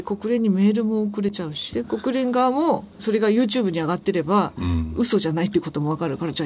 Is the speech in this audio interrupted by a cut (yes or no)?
yes